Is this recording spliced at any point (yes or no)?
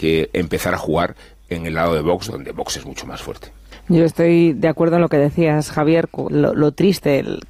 yes